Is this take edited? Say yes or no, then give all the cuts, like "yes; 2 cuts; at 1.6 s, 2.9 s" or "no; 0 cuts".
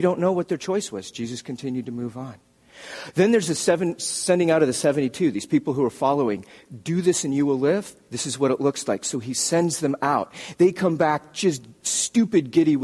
no; 0 cuts